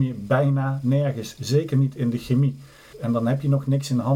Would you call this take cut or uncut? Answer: cut